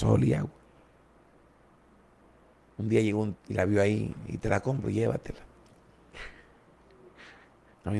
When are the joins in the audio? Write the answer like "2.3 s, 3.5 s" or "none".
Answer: 3.3 s